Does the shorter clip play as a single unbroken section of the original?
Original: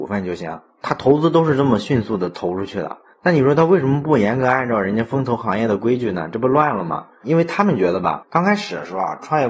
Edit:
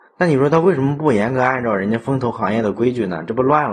yes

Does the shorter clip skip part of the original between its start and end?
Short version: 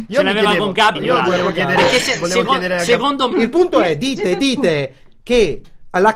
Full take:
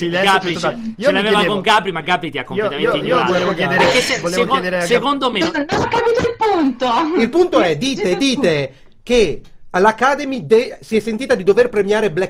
yes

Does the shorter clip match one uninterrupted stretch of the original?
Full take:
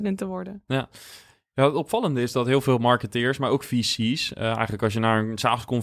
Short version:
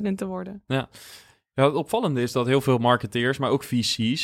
yes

